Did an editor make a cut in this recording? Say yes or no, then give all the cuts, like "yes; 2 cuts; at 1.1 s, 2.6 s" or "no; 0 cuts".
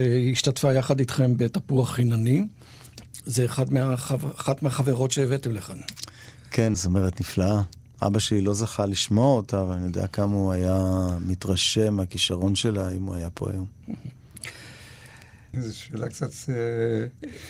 yes; 2 cuts; at 6.7 s, 15.5 s